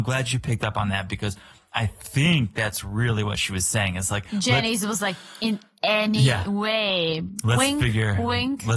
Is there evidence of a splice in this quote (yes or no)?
no